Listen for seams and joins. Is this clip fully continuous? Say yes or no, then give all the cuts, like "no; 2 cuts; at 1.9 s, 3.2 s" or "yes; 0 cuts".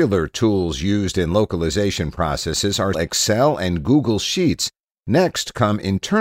no; 1 cut; at 2.9 s